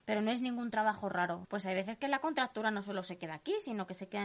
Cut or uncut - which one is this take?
cut